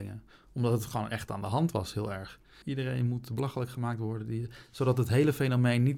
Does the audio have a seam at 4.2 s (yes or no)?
no